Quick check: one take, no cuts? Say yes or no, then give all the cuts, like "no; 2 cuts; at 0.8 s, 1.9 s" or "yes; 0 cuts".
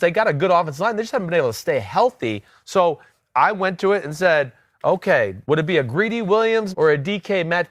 no; 2 cuts; at 5.4 s, 6.7 s